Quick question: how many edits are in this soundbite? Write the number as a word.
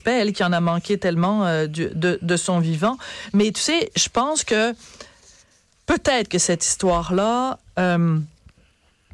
zero